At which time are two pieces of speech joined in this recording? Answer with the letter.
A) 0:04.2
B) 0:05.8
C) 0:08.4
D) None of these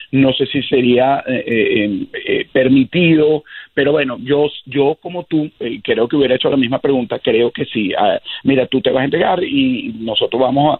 C